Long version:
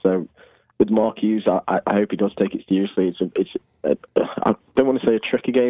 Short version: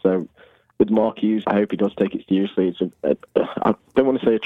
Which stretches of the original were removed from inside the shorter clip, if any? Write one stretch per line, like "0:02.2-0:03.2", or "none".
0:01.4-0:01.8
0:03.3-0:03.7